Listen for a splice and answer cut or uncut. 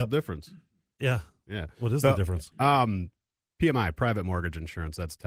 uncut